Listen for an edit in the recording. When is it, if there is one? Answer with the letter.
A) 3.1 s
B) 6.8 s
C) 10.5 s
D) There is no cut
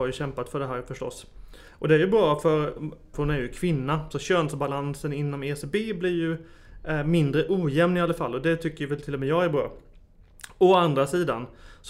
A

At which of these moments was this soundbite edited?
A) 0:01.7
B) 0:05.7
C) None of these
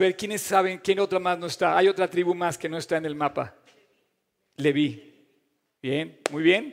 B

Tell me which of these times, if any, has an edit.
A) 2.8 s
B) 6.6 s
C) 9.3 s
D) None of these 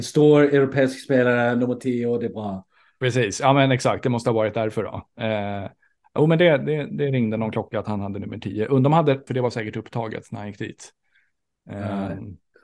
C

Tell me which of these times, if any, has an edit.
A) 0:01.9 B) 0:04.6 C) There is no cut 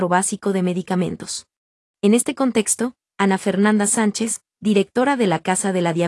A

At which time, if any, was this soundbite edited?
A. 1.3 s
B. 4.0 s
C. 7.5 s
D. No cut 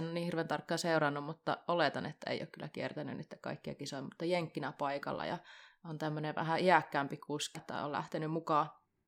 C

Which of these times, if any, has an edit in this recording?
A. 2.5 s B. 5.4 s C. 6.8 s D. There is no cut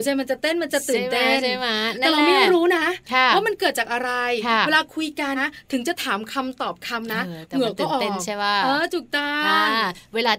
B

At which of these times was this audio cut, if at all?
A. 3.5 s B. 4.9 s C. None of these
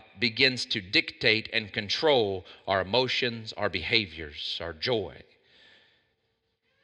A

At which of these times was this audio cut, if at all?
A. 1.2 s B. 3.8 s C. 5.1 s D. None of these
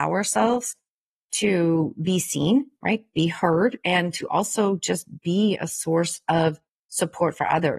B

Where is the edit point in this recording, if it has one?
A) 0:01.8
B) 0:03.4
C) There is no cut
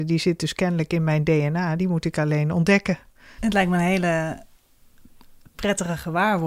B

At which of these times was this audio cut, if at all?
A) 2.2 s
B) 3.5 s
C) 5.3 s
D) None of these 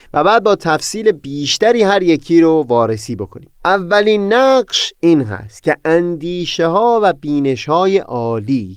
B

